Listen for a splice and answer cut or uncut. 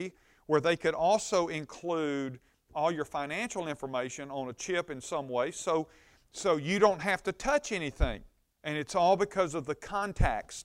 cut